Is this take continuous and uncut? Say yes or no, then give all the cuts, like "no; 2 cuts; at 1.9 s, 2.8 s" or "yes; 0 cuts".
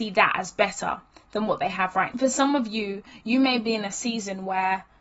no; 1 cut; at 2.1 s